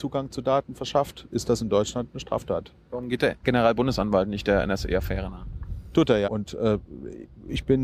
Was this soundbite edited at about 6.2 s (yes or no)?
yes